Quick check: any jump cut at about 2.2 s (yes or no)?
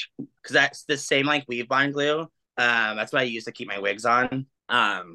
no